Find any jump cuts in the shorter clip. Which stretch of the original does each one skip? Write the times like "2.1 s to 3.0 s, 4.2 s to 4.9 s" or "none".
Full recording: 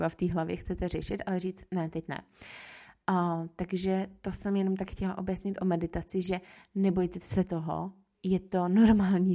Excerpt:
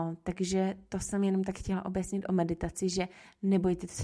none

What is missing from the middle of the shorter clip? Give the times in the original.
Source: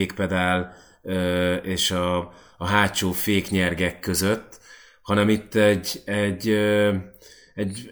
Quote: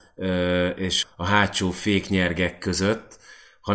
1.9 s to 2.4 s

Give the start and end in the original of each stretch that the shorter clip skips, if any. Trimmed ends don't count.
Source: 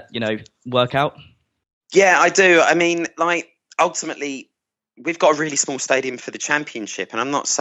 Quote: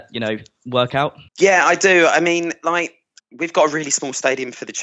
1.3 s to 1.8 s, 3.7 s to 4.9 s

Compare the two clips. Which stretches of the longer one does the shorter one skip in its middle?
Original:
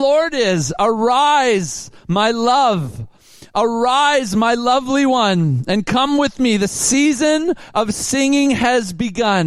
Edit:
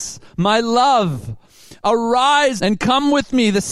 4.3 s to 5.6 s

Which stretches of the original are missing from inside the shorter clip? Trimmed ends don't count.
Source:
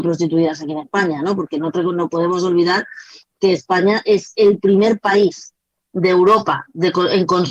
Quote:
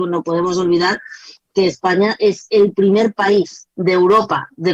5.6 s to 5.9 s

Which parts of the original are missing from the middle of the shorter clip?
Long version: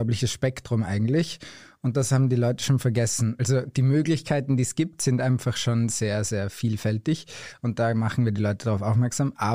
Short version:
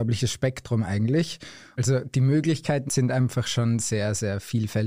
1.8 s to 3.4 s, 4.5 s to 5.0 s

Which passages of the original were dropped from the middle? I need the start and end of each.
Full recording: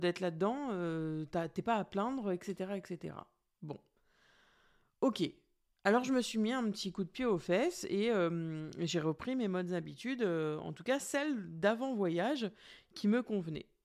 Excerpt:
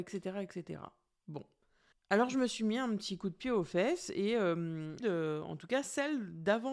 4.3 s to 5.7 s, 8.7 s to 10.2 s

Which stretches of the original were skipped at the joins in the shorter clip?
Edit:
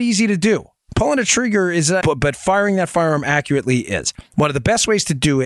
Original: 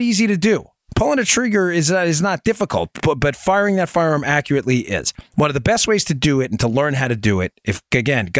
2.0 s to 3.0 s

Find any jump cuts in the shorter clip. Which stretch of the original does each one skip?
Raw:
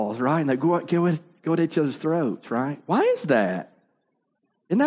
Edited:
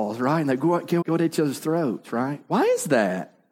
1.0 s to 1.4 s

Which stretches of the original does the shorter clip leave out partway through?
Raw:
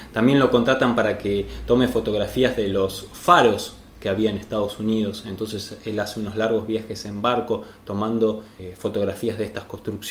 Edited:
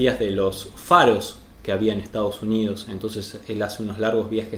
none

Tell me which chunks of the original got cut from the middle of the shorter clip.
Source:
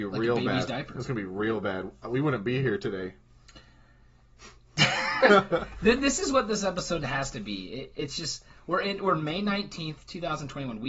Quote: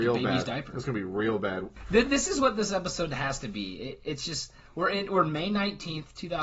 2.0 s to 5.7 s

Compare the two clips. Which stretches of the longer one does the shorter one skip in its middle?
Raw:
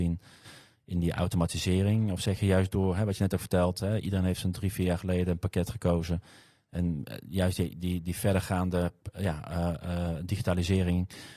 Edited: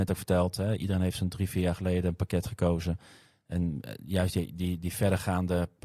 none

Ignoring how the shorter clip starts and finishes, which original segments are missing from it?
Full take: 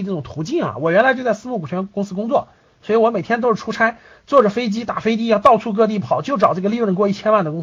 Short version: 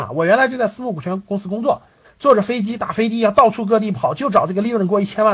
2.7 s to 4.1 s

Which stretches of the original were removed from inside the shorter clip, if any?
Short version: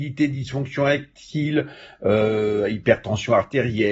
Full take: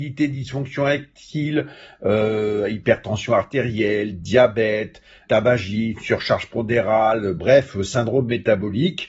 none

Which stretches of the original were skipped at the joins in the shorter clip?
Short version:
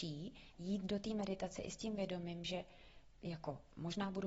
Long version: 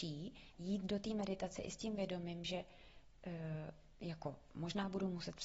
3.2 s to 4.0 s

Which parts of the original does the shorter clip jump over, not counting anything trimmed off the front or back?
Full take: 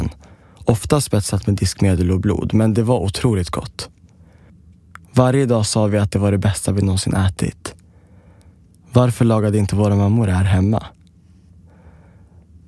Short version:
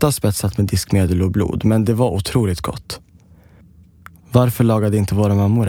5.1 s to 8.8 s

